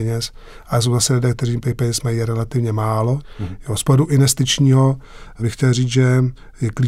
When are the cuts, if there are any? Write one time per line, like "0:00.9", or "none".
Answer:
none